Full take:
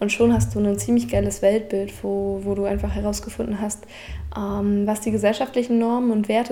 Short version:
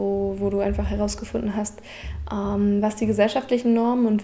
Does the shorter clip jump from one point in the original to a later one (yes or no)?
no